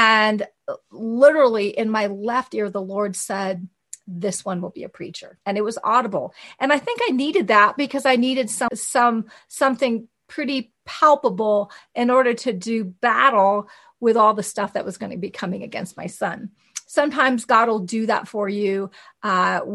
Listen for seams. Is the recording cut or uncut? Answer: cut